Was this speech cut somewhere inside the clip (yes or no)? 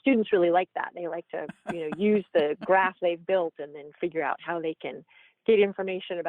no